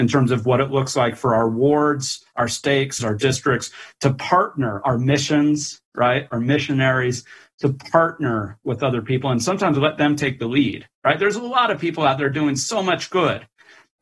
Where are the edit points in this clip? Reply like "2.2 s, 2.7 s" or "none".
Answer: 3.0 s